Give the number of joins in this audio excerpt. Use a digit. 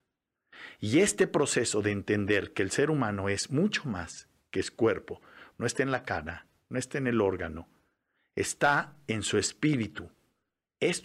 1